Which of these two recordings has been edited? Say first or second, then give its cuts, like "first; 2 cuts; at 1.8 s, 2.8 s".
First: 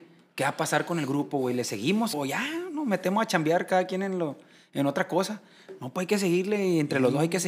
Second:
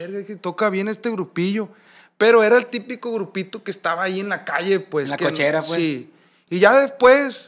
first; 1 cut; at 2.1 s